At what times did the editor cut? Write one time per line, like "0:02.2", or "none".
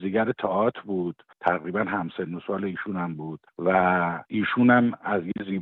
0:04.2

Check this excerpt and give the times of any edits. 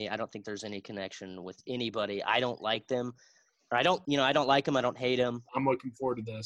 0:04.0
0:05.5

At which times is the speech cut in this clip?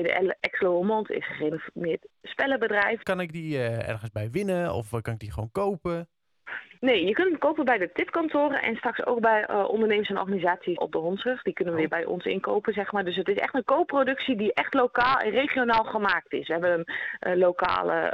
0:03.0
0:10.8

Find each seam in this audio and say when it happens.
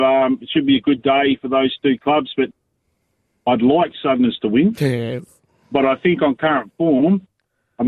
none

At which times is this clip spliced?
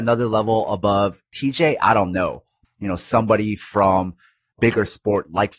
0:02.6
0:04.5

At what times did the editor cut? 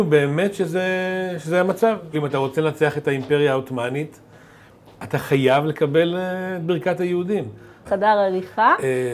0:02.1
0:07.9

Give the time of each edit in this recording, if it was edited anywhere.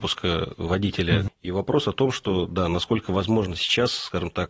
0:01.3

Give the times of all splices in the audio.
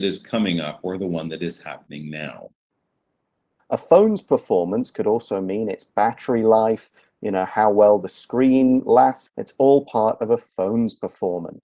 0:03.6
0:09.3

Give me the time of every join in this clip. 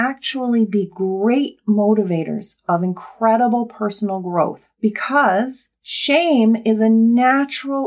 none

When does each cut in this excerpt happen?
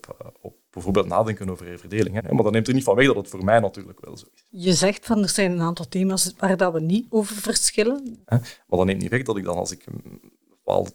0:02.2
0:08.2

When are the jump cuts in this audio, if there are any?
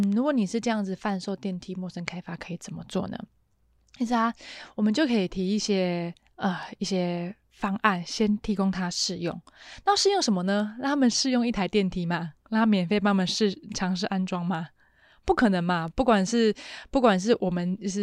none

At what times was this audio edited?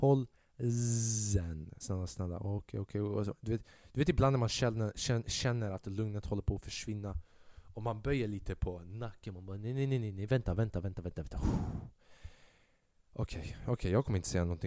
0:01.8

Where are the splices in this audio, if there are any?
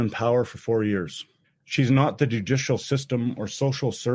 0:01.4

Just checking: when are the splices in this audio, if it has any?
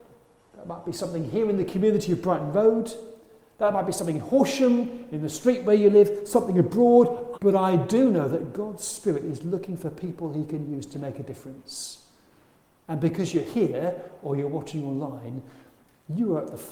0:07.3

